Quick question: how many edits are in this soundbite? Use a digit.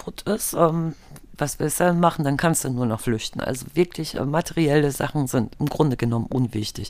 1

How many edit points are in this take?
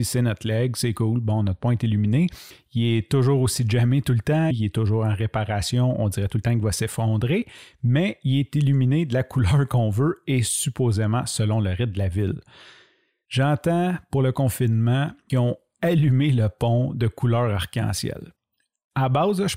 1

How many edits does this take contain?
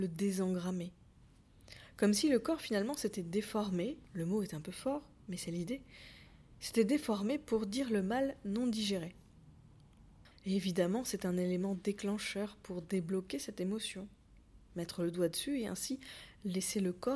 1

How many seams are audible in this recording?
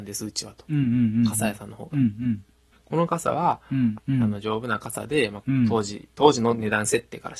3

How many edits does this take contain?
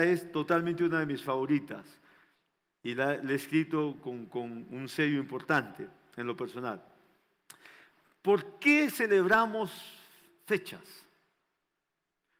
0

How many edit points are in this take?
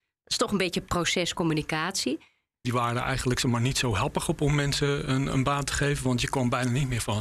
1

